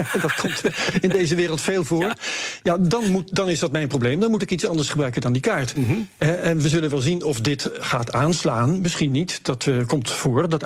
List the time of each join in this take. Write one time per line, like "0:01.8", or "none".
none